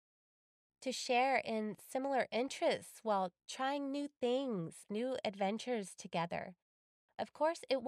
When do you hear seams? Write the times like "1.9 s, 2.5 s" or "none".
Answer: 4.9 s

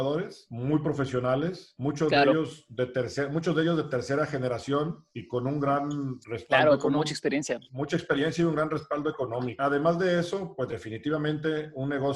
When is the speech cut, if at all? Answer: none

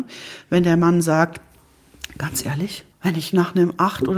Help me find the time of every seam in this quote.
2.9 s

